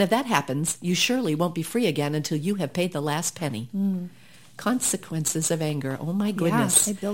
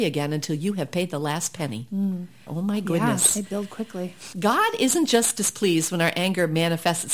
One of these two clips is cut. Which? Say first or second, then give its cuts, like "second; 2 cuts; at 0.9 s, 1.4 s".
second; 2 cuts; at 2.5 s, 4.3 s